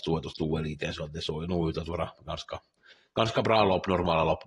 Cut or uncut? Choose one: uncut